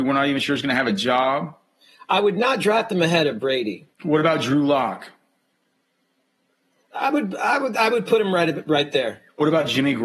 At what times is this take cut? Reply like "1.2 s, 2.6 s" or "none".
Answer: 3.9 s